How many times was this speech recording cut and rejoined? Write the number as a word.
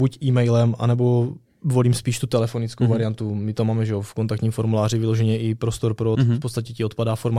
one